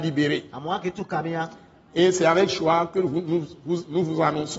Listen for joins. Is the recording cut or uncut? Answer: uncut